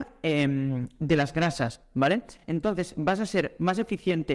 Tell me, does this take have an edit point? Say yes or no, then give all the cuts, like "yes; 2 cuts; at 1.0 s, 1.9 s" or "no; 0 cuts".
no; 0 cuts